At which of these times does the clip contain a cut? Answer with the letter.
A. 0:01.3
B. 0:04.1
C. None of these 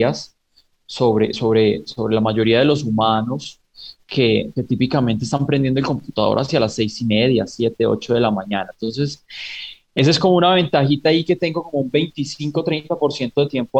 C